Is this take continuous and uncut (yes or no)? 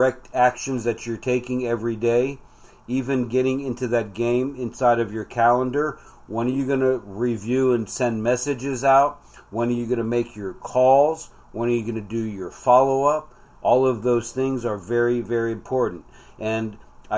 yes